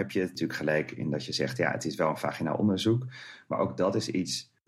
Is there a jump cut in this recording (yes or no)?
no